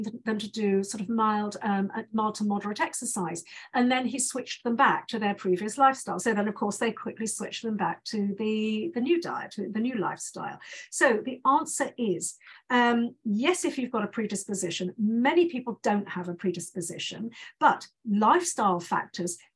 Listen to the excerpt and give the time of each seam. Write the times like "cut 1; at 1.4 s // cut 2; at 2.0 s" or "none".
cut 1; at 6.2 s